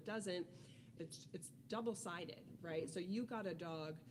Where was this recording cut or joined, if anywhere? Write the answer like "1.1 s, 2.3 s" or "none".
1.0 s